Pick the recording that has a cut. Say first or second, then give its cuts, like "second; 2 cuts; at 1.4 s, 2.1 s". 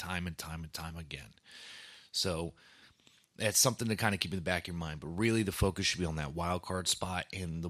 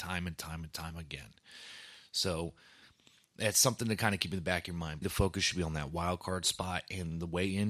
second; 1 cut; at 5.0 s